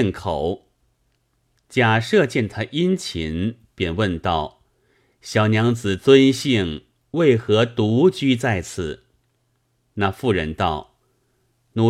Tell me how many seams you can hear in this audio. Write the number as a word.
zero